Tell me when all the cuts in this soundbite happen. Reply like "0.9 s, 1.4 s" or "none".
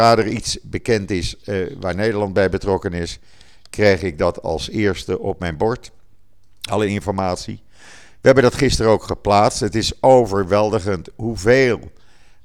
none

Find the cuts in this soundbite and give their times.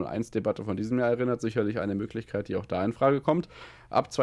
none

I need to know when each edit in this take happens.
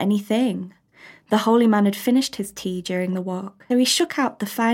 3.7 s

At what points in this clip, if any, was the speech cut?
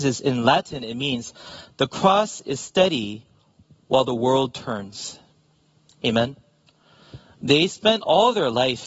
none

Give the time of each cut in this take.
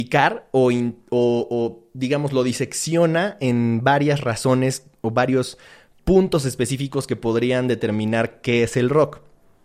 none

